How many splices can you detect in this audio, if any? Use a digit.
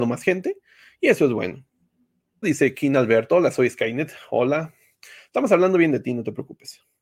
1